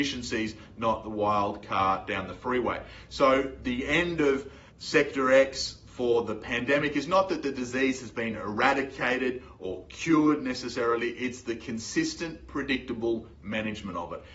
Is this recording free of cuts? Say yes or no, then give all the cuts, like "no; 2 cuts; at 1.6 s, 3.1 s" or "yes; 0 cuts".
no; 1 cut; at 4.7 s